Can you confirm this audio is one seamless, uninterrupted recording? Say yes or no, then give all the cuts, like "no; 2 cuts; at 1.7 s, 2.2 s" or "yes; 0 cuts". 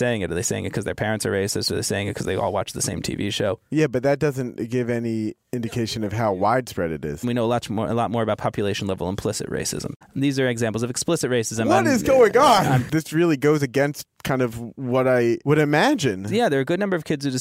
no; 2 cuts; at 7.2 s, 10.0 s